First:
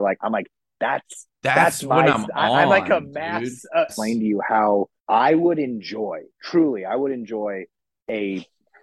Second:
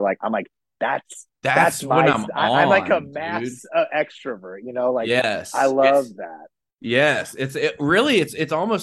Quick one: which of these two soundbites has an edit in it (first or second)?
first